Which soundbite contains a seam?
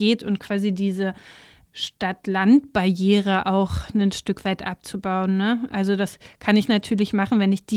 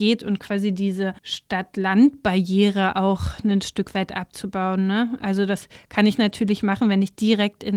second; 1 cut; at 1.2 s

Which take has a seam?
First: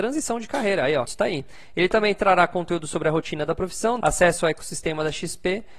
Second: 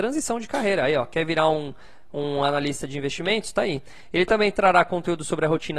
first; 2 cuts; at 1.1 s, 4.0 s

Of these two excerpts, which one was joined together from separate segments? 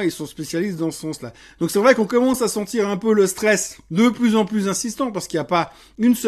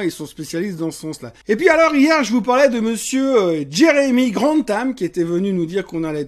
second; 1 cut; at 1.4 s

